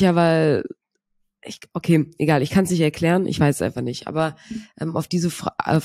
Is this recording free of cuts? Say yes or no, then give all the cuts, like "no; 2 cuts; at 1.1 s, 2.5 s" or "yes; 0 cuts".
yes; 0 cuts